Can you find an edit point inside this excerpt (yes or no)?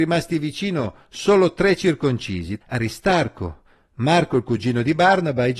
yes